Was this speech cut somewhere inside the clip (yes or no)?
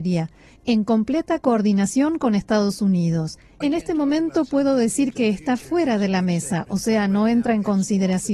yes